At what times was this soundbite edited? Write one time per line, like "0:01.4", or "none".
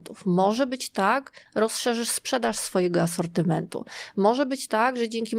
0:01.5